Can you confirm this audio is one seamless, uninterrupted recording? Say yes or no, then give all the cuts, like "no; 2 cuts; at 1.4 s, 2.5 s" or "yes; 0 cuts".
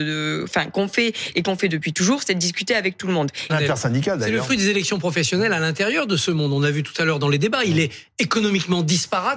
no; 1 cut; at 3.5 s